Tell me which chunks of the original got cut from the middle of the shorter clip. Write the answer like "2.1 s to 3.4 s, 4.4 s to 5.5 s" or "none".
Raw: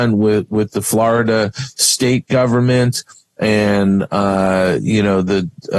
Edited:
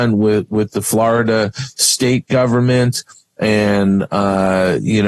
none